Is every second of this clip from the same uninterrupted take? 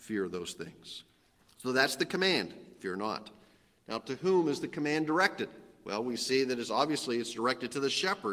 yes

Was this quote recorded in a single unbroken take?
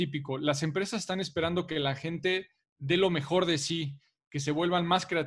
yes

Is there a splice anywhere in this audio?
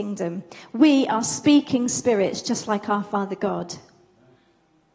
no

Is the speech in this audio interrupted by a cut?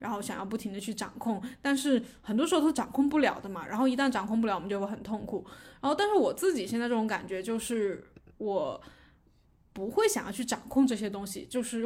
no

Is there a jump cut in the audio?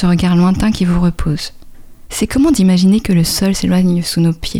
yes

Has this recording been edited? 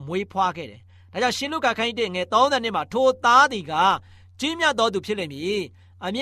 no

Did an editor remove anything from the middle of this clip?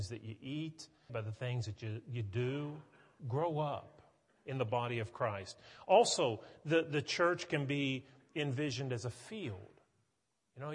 yes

